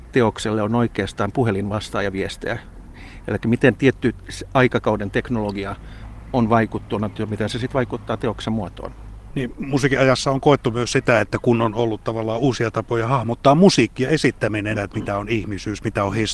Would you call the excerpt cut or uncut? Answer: cut